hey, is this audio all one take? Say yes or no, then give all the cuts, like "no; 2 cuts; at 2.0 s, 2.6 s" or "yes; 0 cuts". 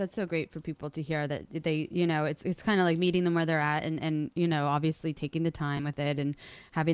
yes; 0 cuts